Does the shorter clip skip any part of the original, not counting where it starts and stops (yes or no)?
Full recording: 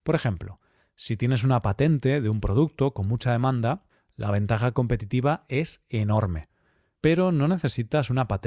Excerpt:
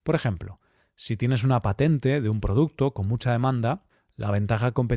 no